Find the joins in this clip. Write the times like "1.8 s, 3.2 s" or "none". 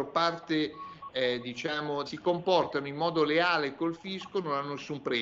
2.1 s